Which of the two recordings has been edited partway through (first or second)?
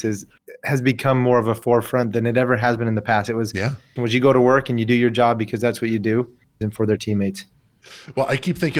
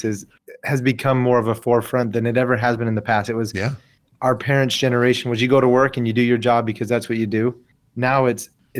first